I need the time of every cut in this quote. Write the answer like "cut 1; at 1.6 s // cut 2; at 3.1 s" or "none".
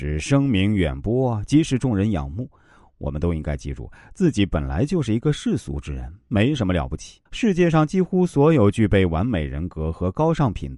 cut 1; at 7.3 s